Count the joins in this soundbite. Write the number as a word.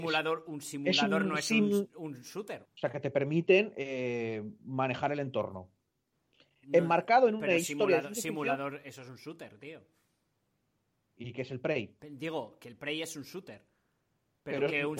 two